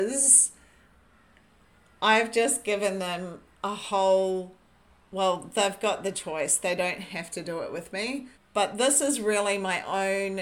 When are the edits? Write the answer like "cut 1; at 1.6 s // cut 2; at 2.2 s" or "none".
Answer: cut 1; at 8.3 s